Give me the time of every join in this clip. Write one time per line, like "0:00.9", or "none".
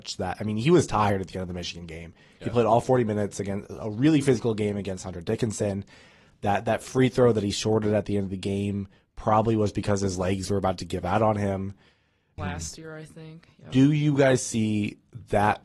0:12.4